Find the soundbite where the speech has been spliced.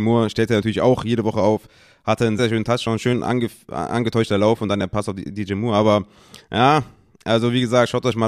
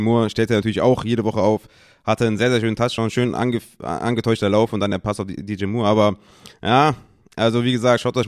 first; 1 cut; at 2.4 s

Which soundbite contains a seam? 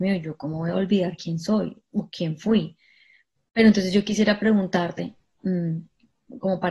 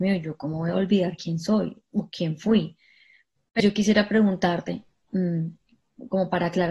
second; 1 cut; at 3.6 s

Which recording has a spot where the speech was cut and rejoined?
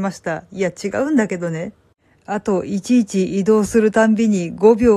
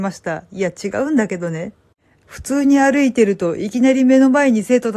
second; 1 cut; at 2.2 s

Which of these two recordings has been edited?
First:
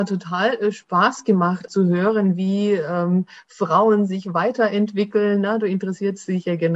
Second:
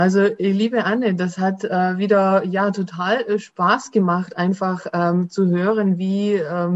first; 1 cut; at 1.7 s

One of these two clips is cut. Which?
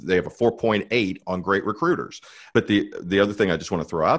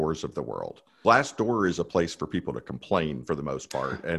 first; 1 cut; at 2.5 s

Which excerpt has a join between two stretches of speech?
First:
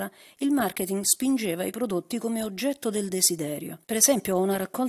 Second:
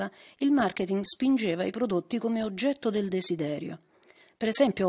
first; 1 cut; at 3.8 s

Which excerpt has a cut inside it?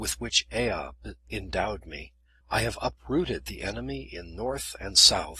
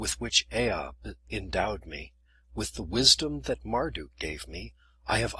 first; 1 cut; at 2.4 s

